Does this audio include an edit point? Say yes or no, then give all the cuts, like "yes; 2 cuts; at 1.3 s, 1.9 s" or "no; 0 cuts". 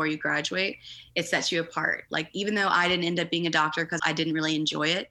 yes; 1 cut; at 4.0 s